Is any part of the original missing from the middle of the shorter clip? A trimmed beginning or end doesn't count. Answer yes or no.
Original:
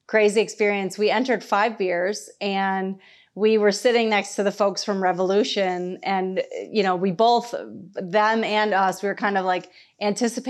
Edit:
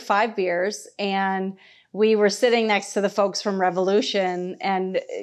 no